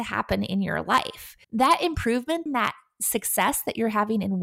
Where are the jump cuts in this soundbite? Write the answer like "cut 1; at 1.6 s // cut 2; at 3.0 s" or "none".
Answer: cut 1; at 1.4 s // cut 2; at 2.5 s